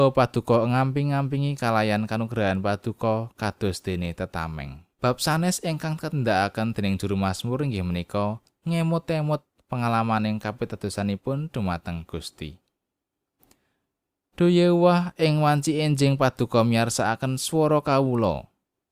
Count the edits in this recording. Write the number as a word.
one